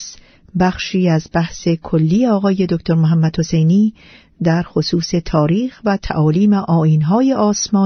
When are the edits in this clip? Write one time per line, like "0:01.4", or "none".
none